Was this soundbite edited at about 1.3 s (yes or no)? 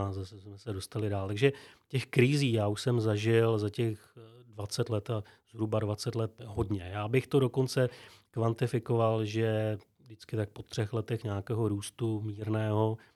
no